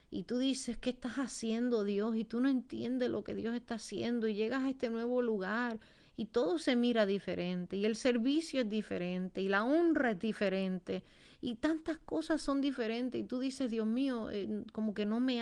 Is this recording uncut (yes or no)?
yes